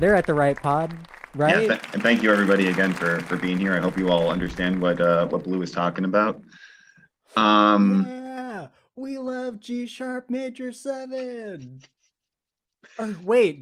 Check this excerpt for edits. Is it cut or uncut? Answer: uncut